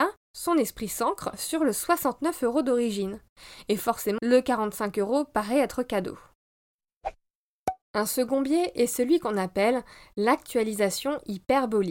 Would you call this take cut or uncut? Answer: cut